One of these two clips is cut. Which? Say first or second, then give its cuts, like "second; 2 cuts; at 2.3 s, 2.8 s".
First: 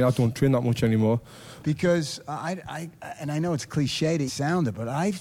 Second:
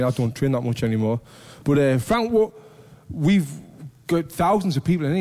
first; 2 cuts; at 1.6 s, 4.3 s